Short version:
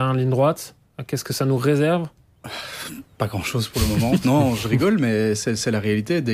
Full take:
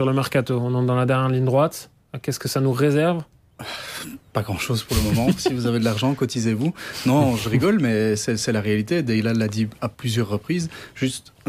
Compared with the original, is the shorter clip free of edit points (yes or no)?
no